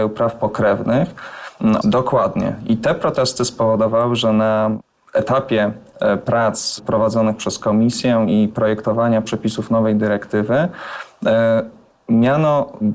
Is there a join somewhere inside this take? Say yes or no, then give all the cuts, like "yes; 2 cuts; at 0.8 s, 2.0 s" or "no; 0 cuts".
yes; 1 cut; at 1.8 s